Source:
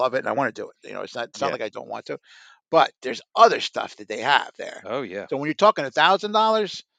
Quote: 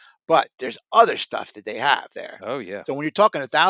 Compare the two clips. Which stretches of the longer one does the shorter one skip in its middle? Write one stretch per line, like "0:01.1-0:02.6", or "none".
none